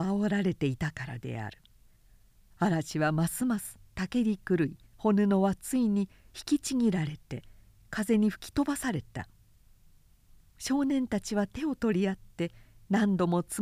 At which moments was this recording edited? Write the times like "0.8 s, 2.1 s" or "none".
4.9 s